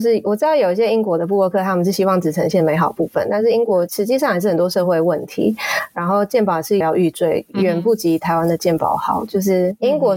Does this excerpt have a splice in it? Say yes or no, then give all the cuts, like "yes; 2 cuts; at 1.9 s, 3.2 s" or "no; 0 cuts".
yes; 1 cut; at 6.8 s